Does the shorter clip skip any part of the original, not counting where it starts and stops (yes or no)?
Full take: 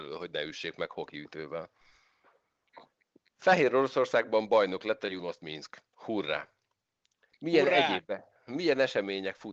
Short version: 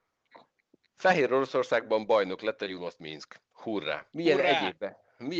yes